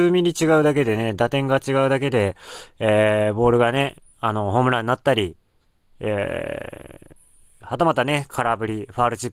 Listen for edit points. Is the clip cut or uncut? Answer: cut